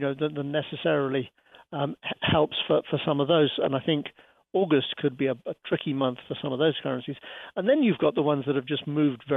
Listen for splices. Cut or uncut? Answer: uncut